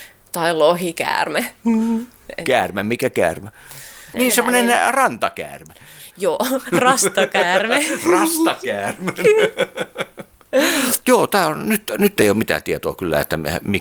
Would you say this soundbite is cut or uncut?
cut